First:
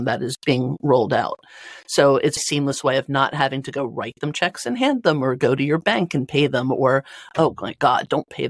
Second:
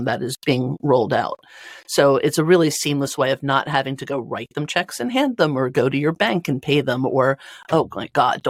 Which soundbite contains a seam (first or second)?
first